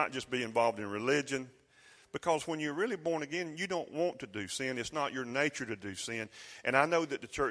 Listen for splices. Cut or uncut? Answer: uncut